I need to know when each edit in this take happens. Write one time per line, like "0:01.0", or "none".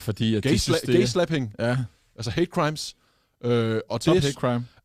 none